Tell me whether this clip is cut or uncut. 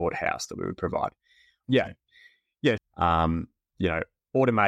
cut